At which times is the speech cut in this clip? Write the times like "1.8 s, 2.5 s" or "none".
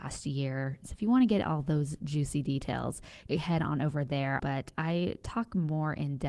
3.3 s, 4.4 s